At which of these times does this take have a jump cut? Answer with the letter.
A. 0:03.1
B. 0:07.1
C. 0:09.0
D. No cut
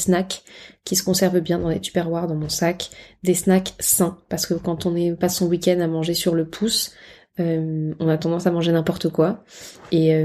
D